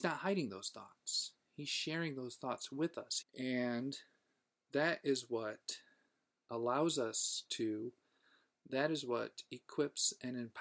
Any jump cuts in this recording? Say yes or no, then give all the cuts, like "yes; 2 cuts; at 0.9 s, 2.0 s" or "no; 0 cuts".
yes; 1 cut; at 3.2 s